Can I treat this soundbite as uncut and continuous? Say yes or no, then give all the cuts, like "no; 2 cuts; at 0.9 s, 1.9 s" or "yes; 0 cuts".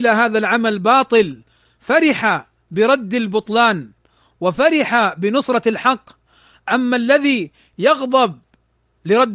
yes; 0 cuts